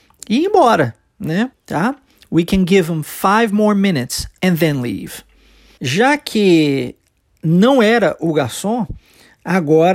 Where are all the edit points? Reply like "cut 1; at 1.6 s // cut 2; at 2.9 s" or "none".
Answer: cut 1; at 1.5 s // cut 2; at 5.8 s